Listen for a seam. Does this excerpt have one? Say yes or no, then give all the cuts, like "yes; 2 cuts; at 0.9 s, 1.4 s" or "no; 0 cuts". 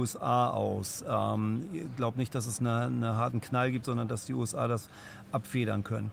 no; 0 cuts